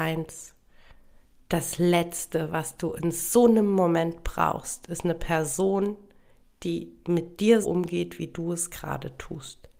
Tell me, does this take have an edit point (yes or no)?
yes